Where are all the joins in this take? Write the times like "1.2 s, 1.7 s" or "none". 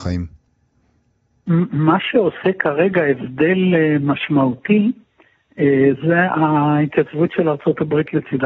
none